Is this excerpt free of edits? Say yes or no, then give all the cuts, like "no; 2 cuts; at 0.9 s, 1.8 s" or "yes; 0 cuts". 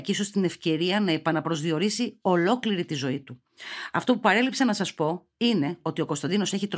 yes; 0 cuts